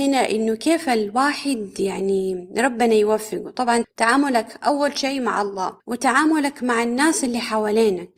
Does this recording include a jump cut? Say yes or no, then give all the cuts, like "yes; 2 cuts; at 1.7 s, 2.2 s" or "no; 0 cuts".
yes; 2 cuts; at 3.8 s, 5.8 s